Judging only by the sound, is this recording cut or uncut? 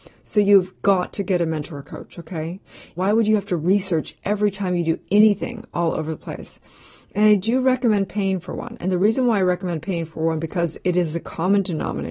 cut